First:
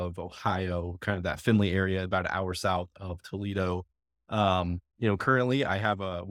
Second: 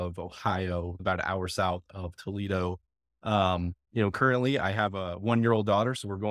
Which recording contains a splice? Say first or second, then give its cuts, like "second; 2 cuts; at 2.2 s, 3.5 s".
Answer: second; 1 cut; at 1.0 s